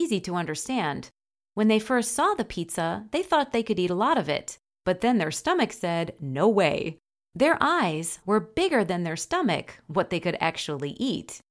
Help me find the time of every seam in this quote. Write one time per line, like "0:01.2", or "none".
0:08.2